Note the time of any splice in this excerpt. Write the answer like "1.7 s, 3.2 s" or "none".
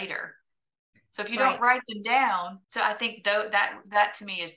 0.9 s, 2.6 s